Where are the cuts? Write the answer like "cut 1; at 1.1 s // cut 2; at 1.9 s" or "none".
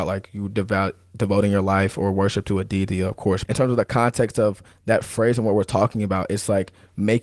cut 1; at 3.4 s